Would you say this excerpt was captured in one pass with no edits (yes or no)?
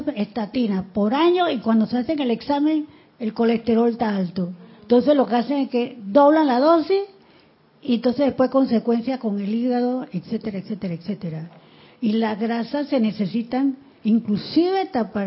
yes